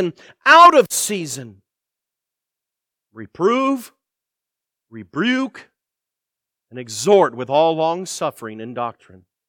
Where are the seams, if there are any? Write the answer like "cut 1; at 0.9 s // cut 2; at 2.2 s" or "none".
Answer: none